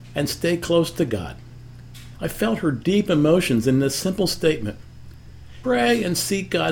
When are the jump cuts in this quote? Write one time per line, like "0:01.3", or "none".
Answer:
0:02.1
0:05.6